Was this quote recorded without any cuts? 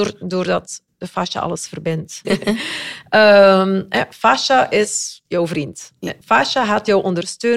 no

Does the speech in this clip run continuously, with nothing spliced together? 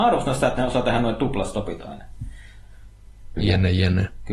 no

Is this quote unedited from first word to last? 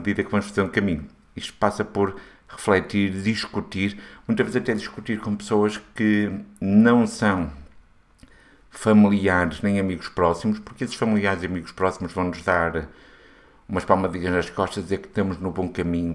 yes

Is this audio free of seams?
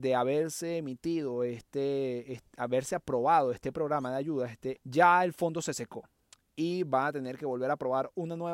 no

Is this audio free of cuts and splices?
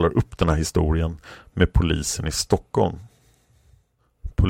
yes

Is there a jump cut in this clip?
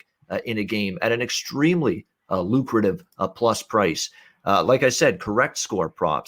no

